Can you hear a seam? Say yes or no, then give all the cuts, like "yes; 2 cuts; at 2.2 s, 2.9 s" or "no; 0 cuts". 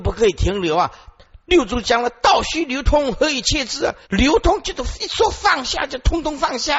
yes; 1 cut; at 4.0 s